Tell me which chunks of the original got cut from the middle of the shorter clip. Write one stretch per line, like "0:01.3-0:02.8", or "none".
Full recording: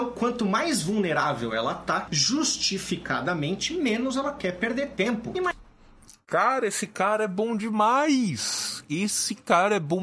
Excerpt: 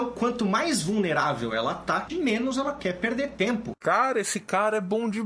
0:02.1-0:03.7
0:05.3-0:06.2